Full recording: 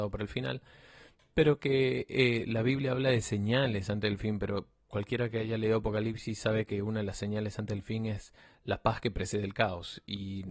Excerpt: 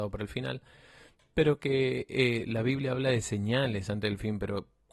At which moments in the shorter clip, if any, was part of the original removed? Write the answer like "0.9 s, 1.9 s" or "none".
none